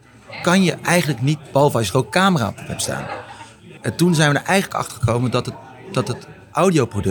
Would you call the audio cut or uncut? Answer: cut